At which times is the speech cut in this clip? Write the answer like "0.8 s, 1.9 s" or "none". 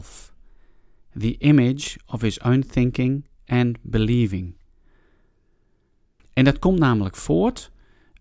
6.2 s